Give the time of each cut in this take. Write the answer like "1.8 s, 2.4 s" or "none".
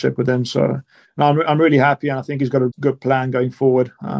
2.7 s

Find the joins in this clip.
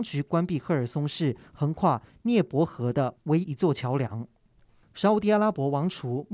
3.4 s

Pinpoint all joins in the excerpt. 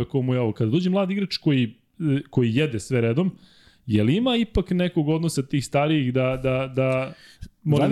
none

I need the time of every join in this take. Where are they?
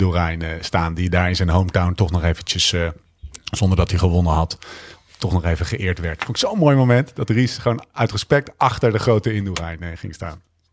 none

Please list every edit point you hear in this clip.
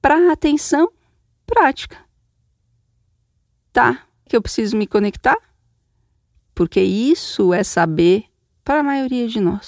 4.3 s, 6.4 s

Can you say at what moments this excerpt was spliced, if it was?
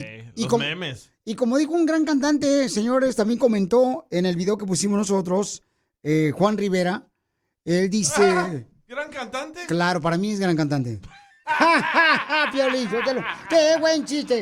none

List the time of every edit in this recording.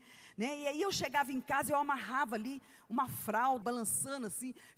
3.6 s

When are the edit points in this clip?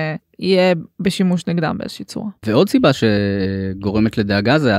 2.4 s

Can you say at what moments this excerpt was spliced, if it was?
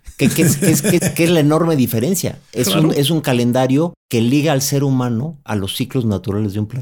1.0 s

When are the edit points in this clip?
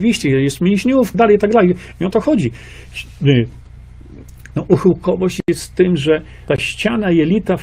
1.1 s, 4.5 s

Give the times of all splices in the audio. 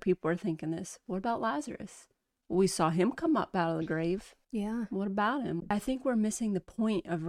4.4 s, 5.6 s

